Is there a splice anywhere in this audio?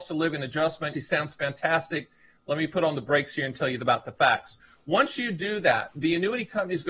yes; 1 cut; at 0.9 s

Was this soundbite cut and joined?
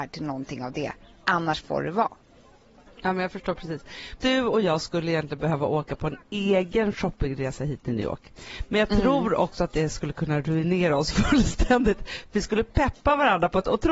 no; 0 cuts

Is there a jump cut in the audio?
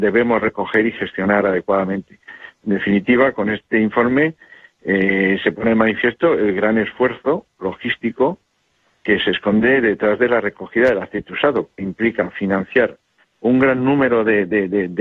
yes; 1 cut; at 2.5 s

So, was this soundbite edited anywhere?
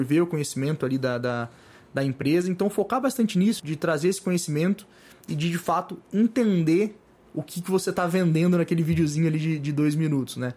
yes; 1 cut; at 3.6 s

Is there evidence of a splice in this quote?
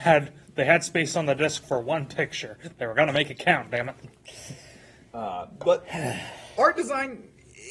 no; 0 cuts

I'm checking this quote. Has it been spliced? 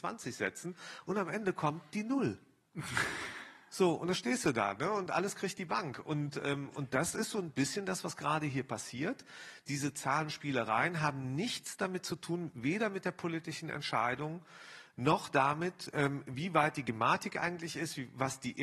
no; 0 cuts

